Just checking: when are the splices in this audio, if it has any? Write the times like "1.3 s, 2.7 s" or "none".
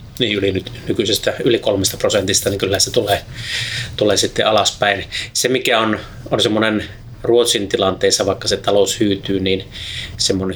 none